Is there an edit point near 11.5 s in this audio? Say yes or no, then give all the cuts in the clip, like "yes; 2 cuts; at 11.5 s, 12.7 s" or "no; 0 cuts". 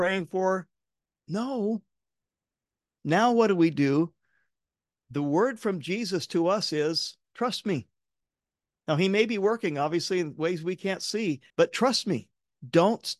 yes; 1 cut; at 11.5 s